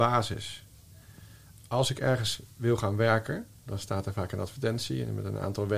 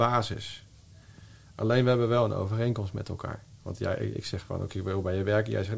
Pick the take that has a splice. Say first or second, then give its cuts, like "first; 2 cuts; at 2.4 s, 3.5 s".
second; 1 cut; at 1.5 s